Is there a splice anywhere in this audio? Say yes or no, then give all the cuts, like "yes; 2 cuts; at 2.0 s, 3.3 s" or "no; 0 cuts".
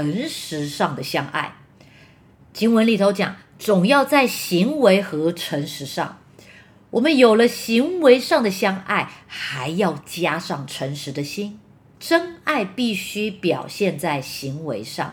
yes; 1 cut; at 12.0 s